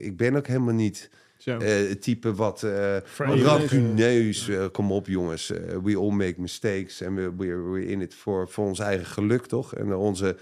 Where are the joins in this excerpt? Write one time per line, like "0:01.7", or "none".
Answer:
none

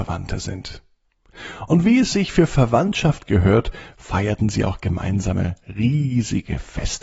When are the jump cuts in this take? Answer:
none

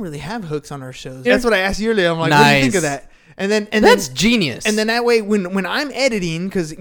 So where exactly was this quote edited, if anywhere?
0:01.2

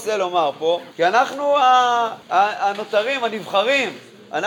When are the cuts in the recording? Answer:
0:00.9
0:02.2

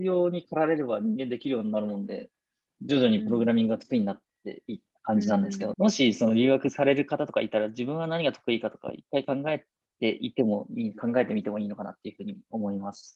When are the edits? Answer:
0:05.7

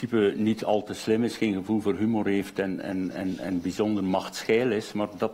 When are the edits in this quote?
none

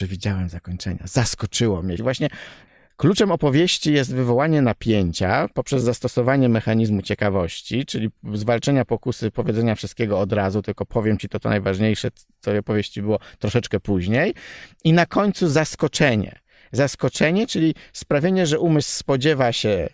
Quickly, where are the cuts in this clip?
0:02.0

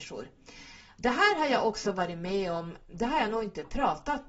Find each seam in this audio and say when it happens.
none

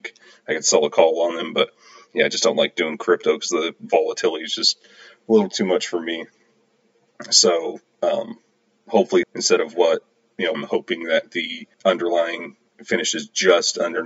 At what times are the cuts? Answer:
0:09.2
0:10.5
0:11.7

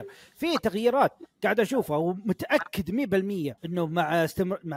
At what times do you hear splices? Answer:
0:03.6

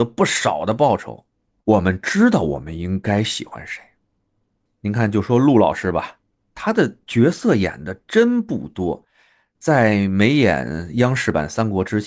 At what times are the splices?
0:01.6

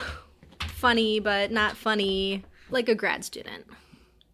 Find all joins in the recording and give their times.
0:02.7

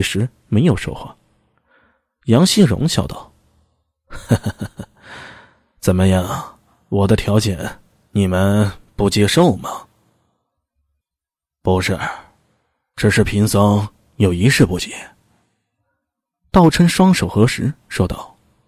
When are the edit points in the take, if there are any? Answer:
none

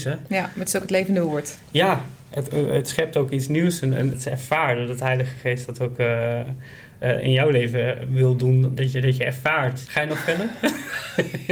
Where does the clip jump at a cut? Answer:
0:04.1
0:08.8
0:09.9

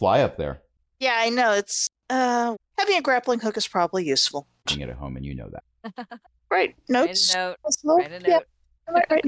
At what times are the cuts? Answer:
0:02.6
0:04.7

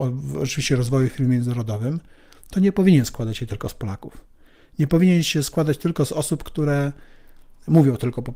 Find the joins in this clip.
none

